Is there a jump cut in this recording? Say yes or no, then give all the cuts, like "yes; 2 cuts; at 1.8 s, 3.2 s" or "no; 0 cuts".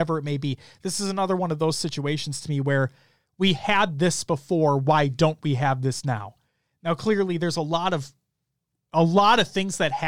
no; 0 cuts